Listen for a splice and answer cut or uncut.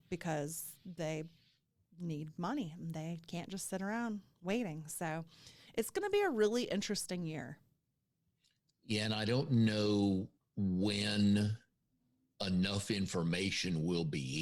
uncut